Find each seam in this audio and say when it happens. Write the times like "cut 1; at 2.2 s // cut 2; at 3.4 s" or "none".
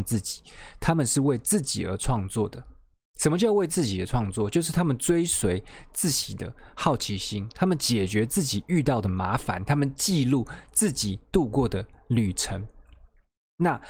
none